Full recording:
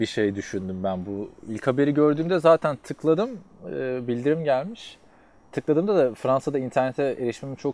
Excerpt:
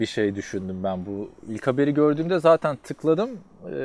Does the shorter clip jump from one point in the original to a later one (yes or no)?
no